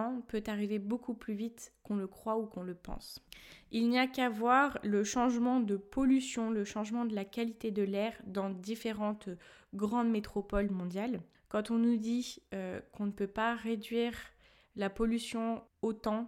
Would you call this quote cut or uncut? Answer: uncut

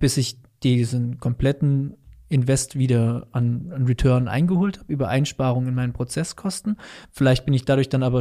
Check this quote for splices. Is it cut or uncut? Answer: uncut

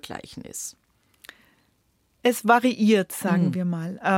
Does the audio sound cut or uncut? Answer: uncut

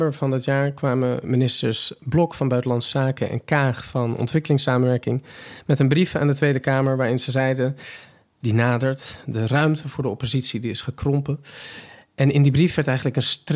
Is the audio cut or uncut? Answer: cut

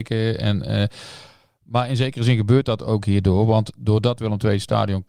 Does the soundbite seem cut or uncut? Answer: uncut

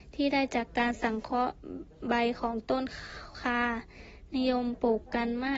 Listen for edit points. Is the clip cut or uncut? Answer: cut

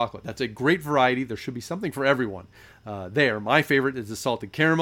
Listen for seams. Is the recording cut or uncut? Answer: uncut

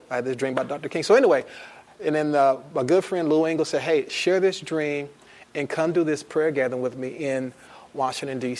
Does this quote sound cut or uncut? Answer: cut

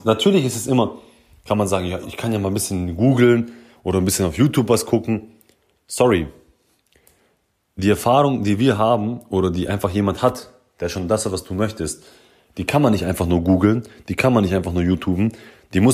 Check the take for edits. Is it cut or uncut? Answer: cut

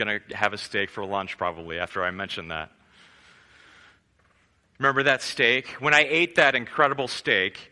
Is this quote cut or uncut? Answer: uncut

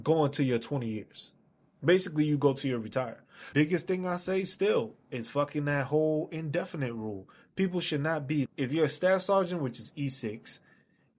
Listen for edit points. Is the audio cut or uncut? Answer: cut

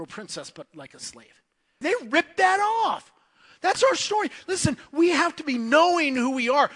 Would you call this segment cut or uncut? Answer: cut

